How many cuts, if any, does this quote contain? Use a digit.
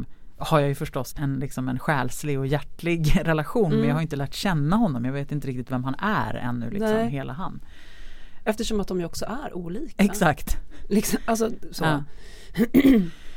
2